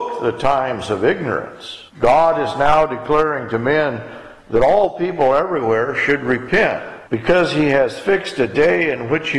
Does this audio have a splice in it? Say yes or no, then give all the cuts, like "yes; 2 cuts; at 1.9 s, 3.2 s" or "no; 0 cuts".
yes; 2 cuts; at 1.9 s, 7.1 s